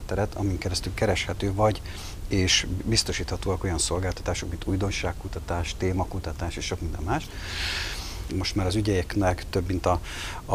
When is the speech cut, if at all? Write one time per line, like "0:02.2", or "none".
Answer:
0:08.3